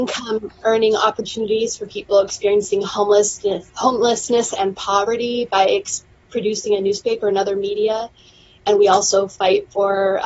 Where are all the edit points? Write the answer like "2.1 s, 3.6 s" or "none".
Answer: none